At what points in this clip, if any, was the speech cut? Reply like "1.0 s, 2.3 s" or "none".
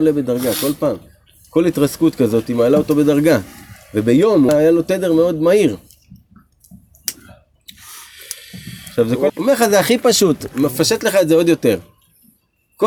4.5 s, 9.3 s